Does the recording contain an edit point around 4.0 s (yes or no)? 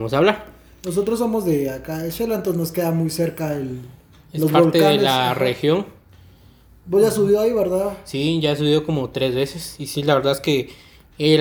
no